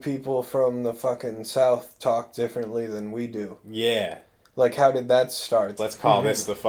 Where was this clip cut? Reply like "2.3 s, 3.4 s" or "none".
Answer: 5.8 s